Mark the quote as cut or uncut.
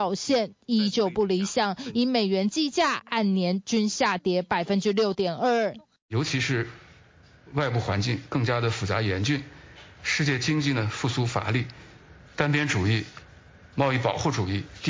uncut